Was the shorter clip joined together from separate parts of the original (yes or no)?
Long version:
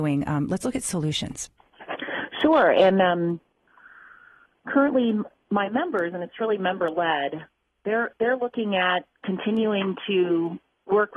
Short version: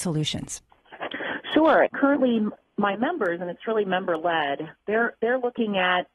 yes